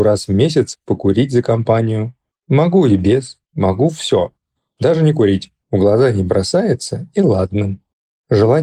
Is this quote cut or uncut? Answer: cut